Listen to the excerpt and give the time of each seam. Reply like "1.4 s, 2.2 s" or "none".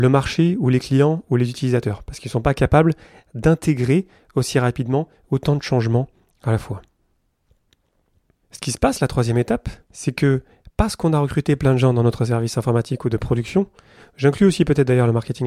8.4 s, 9.8 s